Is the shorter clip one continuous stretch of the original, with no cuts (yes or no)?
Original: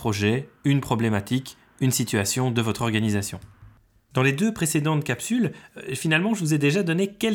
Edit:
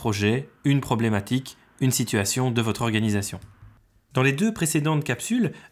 yes